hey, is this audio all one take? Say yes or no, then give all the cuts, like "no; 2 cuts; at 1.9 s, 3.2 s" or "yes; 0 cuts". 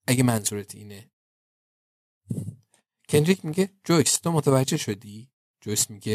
yes; 0 cuts